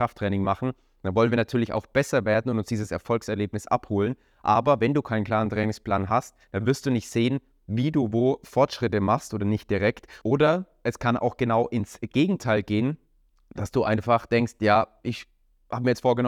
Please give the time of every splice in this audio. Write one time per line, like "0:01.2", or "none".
0:10.2